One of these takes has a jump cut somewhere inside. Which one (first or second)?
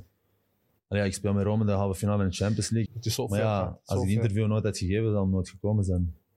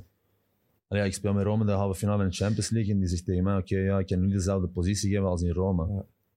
first